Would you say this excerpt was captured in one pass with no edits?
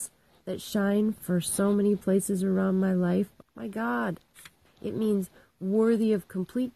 no; 2 cuts; at 3.4 s, 4.7 s

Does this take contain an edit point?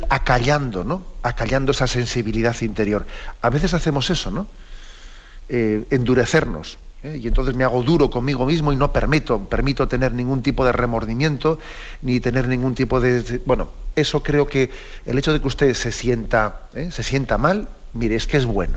no; 0 cuts

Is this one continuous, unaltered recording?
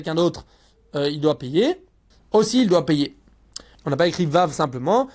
no; 2 cuts; at 2.1 s, 3.7 s

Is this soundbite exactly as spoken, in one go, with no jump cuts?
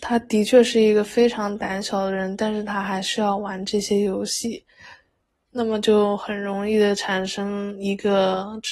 no; 1 cut; at 5.4 s

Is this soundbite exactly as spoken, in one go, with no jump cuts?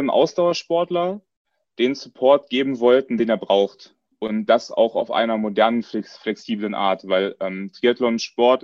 yes; 0 cuts

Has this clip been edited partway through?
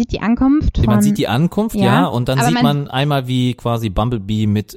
no; 0 cuts

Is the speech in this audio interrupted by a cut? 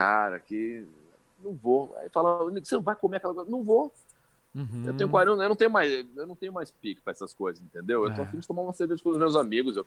no; 0 cuts

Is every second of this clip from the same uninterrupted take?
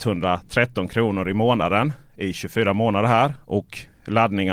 yes; 0 cuts

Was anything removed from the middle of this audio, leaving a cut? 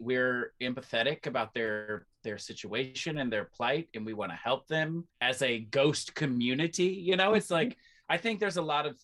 yes; 1 cut; at 5.1 s

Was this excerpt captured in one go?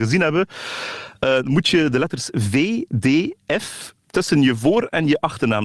yes; 0 cuts

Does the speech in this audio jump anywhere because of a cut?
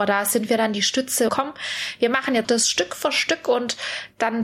yes; 2 cuts; at 1.3 s, 2.4 s

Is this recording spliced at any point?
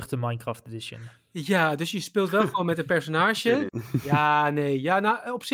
yes; 1 cut; at 3.7 s

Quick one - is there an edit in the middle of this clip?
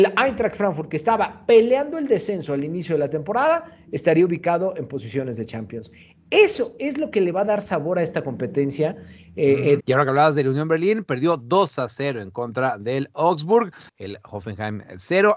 yes; 2 cuts; at 9.8 s, 13.9 s

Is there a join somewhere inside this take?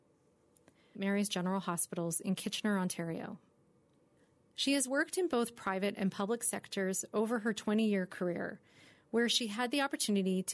yes; 1 cut; at 0.9 s

